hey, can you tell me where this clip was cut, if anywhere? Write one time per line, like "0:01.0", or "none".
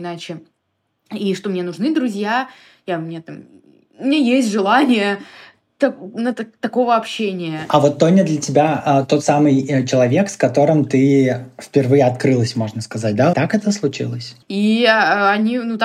0:13.3
0:14.4